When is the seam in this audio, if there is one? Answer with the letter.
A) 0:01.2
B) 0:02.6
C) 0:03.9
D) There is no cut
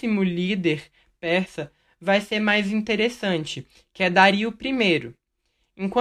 D